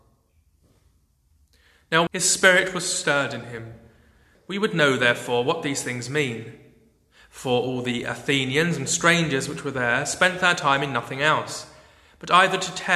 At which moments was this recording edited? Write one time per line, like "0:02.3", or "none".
0:02.1
0:04.3

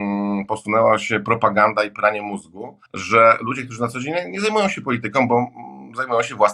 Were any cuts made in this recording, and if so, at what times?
0:02.9

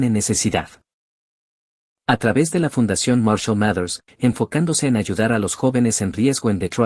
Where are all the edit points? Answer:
0:01.9
0:04.1

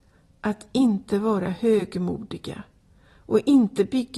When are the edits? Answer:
none

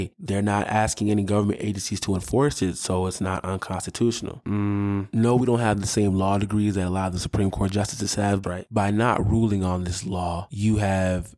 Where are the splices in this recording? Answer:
0:08.4

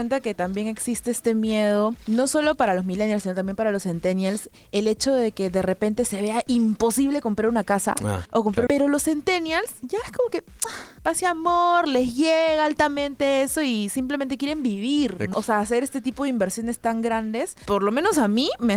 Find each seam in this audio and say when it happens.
0:08.7
0:15.3

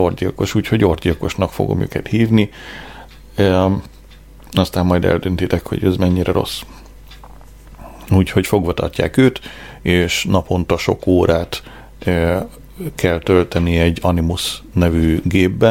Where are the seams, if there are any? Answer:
0:08.1

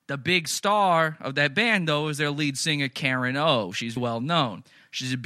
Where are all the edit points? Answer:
0:04.0

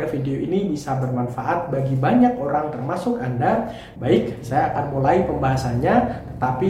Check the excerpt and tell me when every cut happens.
0:03.9

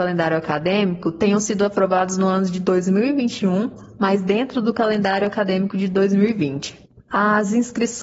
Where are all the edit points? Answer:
none

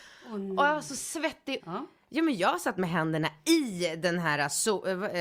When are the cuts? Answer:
0:01.6

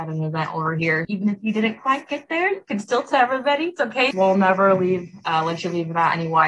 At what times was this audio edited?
0:01.0
0:04.1

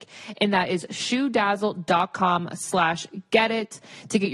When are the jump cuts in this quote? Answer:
none

